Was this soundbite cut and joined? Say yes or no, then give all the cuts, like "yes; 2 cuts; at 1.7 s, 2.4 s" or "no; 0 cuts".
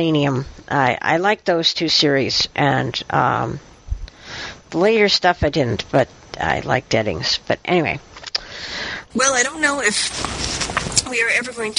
yes; 1 cut; at 9.1 s